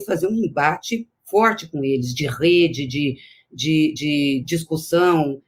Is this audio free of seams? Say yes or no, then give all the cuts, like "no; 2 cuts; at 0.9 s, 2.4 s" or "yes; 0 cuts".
yes; 0 cuts